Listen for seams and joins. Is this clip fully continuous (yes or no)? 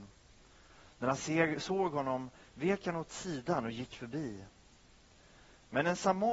yes